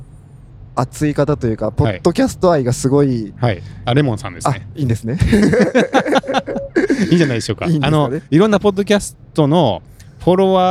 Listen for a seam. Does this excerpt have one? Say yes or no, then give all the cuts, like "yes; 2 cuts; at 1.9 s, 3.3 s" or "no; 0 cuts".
no; 0 cuts